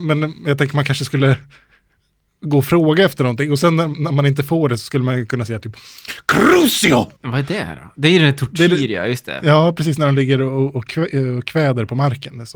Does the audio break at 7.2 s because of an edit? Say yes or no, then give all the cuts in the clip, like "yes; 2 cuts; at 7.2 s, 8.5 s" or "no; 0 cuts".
yes; 1 cut; at 7.2 s